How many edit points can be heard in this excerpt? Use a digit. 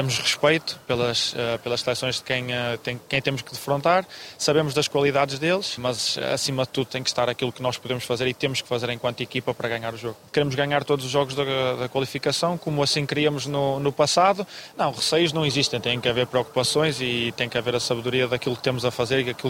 3